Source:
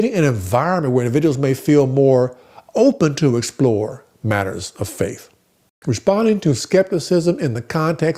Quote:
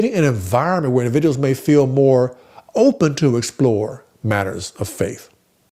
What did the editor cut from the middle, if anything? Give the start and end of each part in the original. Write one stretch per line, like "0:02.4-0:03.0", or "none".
none